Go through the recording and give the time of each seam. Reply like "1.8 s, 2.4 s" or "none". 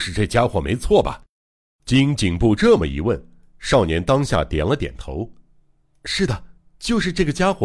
none